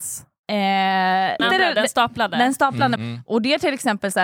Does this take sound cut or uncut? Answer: cut